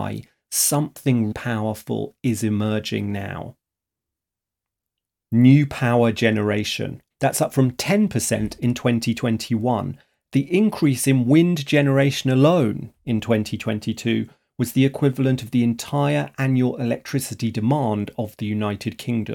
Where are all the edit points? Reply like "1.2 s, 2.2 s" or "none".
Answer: 1.3 s, 7.1 s